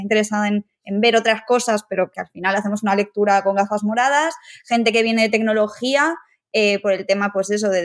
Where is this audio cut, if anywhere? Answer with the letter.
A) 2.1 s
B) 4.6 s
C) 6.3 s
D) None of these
A